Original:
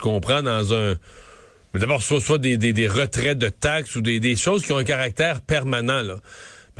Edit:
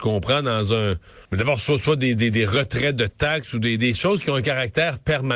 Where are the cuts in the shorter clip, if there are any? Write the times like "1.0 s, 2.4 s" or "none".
1.2 s